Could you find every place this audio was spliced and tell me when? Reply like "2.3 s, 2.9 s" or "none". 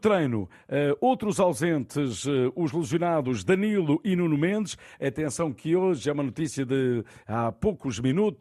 none